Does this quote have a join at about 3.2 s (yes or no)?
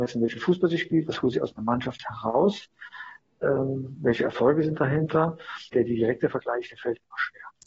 no